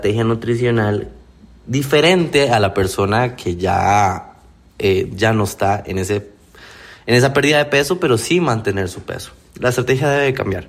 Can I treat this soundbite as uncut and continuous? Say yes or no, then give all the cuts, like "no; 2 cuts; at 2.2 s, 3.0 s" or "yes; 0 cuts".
yes; 0 cuts